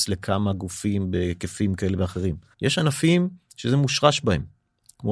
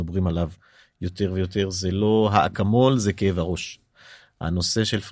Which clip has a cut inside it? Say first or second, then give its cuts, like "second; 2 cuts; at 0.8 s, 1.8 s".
first; 1 cut; at 2.5 s